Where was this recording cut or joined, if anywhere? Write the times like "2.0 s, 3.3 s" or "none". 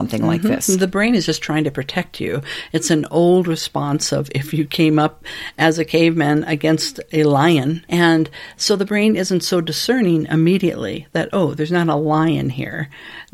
7.9 s